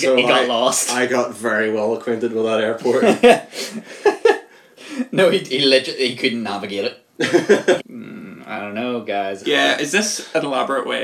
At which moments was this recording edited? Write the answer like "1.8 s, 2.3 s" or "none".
7.8 s, 9.4 s

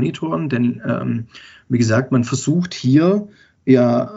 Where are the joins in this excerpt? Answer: none

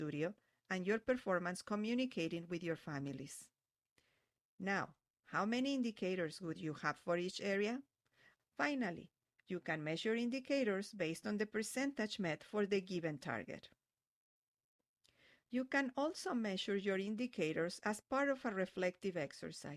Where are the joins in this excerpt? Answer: 8.4 s

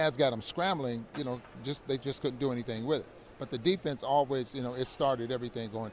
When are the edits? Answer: none

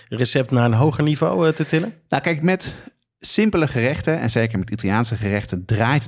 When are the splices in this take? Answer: none

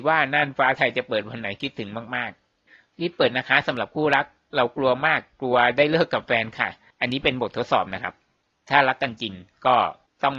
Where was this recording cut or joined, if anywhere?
none

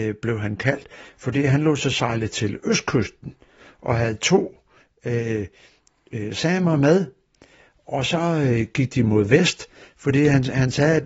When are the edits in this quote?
none

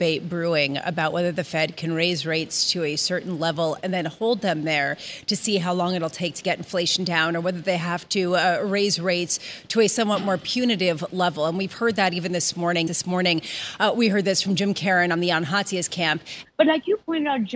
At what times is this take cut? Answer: 12.9 s, 16.4 s

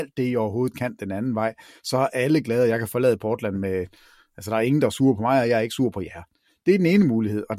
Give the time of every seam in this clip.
none

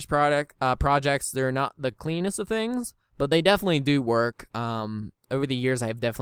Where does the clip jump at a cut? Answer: none

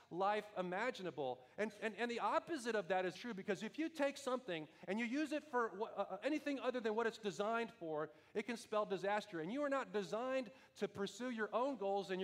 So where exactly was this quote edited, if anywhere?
3.1 s, 6.2 s

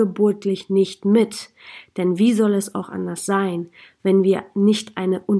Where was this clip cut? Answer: none

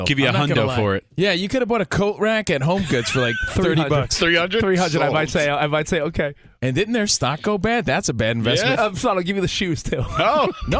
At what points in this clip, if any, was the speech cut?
8.7 s

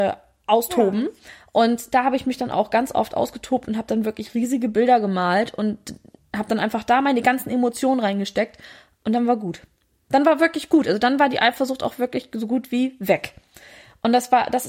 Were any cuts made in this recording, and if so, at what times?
none

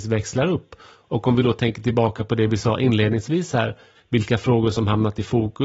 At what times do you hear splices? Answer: 3.9 s

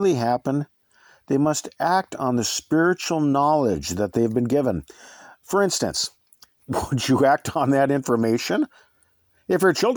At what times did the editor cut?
6.6 s

